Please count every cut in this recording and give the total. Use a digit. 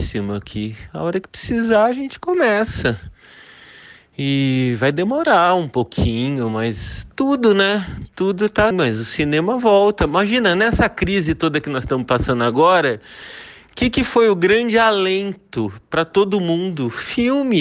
1